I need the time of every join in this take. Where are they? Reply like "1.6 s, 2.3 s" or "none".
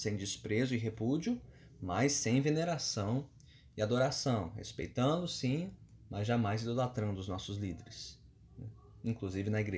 none